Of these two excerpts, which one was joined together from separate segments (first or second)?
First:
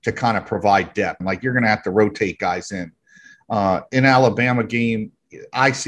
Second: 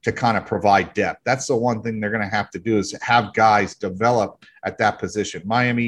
first